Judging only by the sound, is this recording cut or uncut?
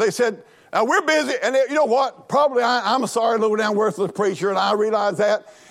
uncut